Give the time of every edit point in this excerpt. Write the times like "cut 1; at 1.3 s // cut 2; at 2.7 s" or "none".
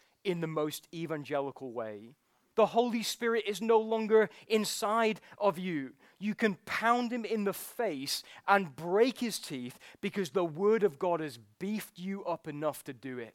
cut 1; at 2.5 s